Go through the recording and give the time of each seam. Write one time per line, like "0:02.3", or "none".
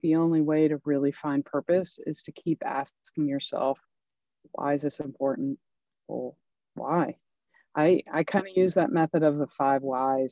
none